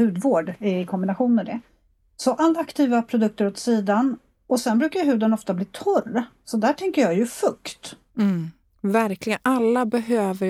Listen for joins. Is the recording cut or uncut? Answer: uncut